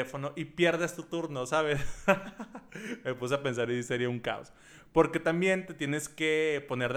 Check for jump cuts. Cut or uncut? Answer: uncut